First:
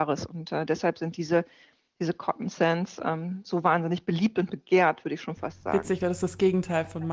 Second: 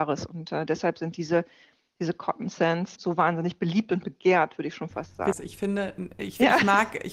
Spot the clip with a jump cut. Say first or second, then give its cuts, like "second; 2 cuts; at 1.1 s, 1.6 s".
second; 2 cuts; at 3.0 s, 5.3 s